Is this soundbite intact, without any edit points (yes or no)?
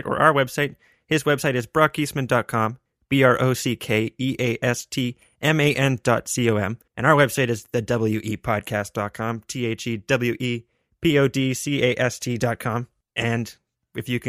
no